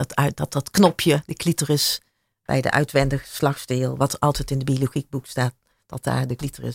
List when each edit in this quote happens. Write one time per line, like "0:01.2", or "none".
none